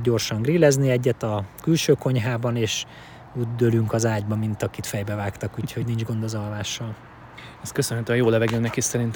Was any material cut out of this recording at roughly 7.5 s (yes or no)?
no